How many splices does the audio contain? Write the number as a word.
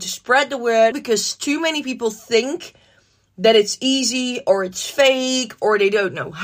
one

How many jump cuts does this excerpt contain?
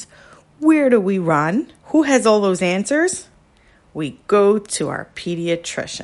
one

